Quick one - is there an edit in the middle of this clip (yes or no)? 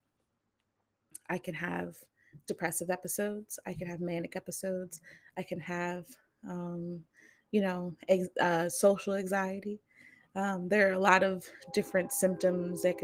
no